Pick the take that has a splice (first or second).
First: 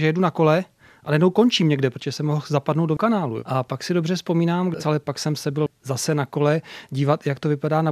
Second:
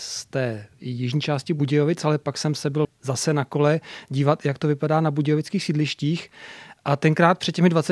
first